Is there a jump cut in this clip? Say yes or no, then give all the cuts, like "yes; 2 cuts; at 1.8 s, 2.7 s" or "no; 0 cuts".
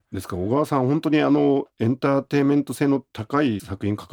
no; 0 cuts